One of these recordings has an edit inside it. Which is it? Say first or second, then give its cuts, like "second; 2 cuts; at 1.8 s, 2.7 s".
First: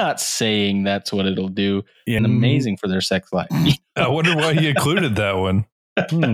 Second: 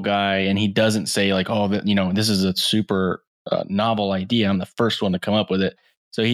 first; 1 cut; at 2.2 s